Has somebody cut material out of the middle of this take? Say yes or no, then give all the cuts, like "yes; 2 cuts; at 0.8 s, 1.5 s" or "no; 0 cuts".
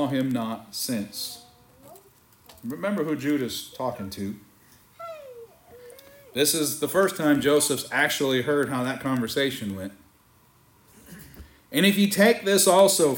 no; 0 cuts